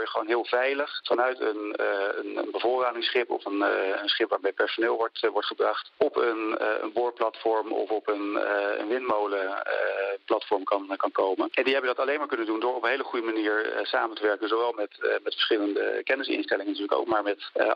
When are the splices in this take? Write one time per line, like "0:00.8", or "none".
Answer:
none